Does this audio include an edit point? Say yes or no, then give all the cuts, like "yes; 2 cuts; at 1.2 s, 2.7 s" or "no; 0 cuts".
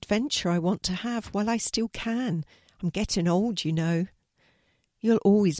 no; 0 cuts